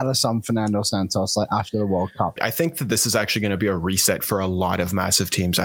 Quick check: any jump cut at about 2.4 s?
yes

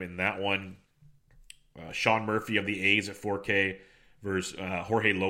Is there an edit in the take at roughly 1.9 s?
no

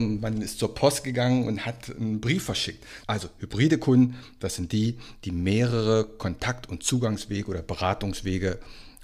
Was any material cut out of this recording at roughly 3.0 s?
yes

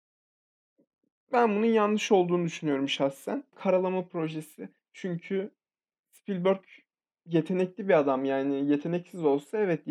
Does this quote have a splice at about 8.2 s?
no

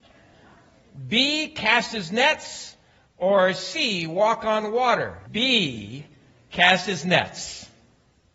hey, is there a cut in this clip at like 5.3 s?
yes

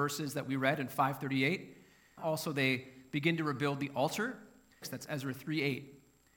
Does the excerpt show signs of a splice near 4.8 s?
yes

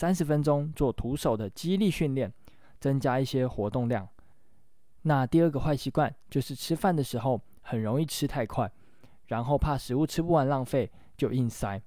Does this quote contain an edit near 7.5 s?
no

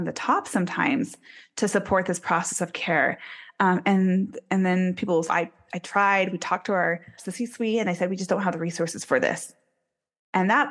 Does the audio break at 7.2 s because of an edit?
yes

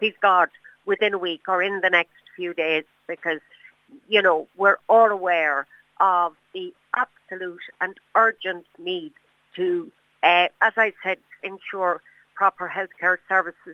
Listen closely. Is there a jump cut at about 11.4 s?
yes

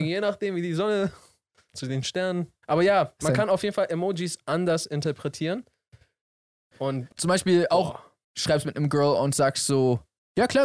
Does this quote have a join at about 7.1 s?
yes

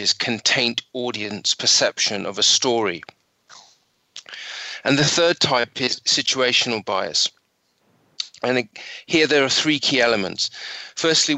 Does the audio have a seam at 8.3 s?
no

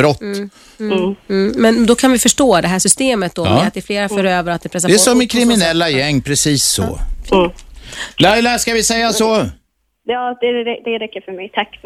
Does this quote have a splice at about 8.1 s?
no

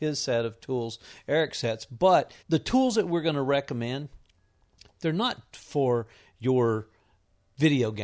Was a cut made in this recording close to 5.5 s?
yes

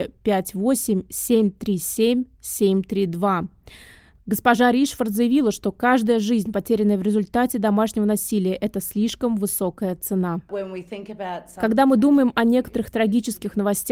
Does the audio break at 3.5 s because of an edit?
no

